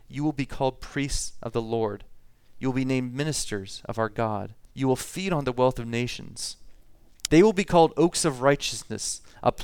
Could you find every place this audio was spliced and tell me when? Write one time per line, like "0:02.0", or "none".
0:04.7
0:07.3